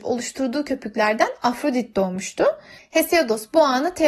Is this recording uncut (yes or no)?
no